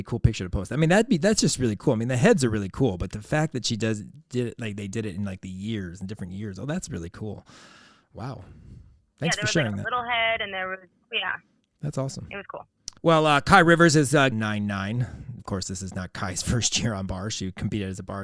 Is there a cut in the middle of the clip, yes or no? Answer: yes